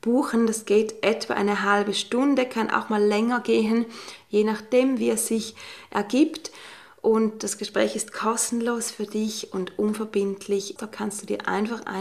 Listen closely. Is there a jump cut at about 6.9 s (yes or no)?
no